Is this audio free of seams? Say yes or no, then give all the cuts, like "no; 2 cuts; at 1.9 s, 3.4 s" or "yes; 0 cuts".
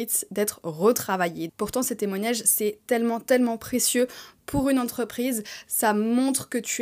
no; 2 cuts; at 1.5 s, 3.2 s